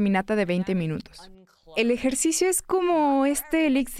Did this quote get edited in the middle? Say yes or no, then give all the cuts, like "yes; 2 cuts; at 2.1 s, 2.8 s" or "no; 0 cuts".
no; 0 cuts